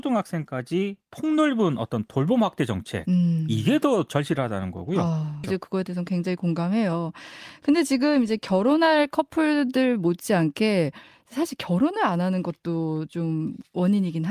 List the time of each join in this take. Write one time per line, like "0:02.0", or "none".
0:05.4

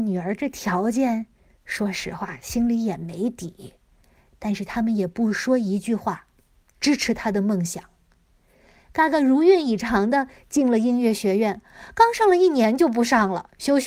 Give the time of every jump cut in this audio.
none

